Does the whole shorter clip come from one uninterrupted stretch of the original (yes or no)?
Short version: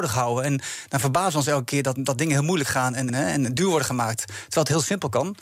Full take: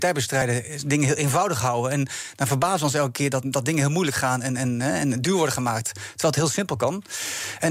no